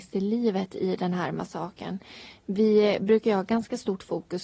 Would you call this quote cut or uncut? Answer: uncut